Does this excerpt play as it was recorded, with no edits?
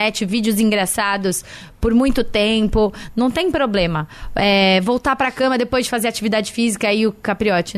yes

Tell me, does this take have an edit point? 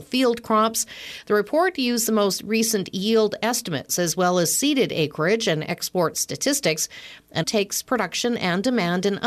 yes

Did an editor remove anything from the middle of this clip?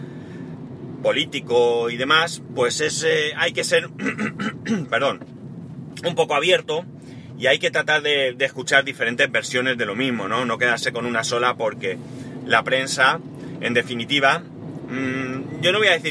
no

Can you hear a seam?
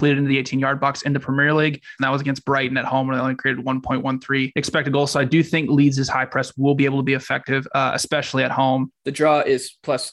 yes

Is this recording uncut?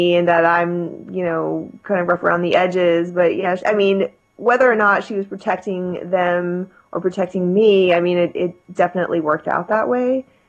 no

